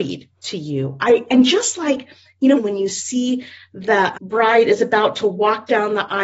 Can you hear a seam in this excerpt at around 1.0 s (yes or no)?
no